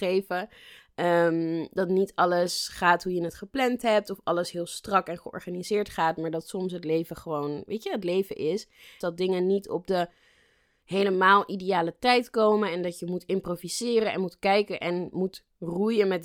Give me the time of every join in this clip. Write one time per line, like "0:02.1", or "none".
0:09.0